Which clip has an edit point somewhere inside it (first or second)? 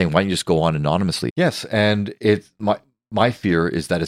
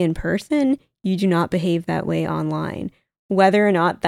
first